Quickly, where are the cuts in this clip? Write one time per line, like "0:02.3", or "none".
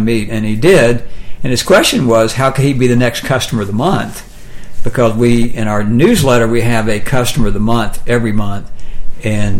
none